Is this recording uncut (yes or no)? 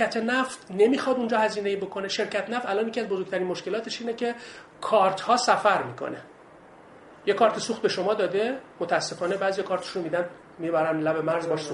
yes